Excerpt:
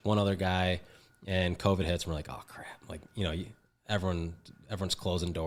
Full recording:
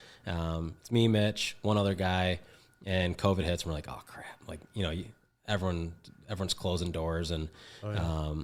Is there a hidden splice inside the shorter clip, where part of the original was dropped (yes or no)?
no